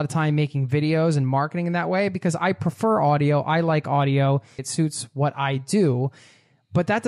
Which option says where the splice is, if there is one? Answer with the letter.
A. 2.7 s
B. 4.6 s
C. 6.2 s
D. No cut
B